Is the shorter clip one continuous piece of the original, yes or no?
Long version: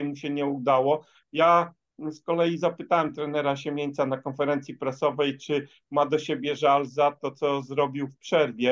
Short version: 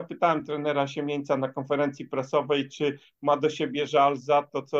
yes